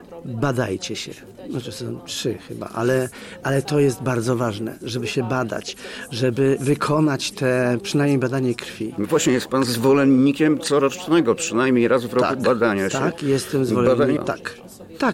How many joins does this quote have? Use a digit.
2